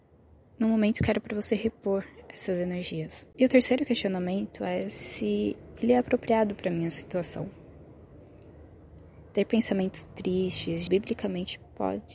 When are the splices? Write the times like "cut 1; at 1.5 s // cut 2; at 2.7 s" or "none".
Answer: cut 1; at 3.3 s // cut 2; at 10.9 s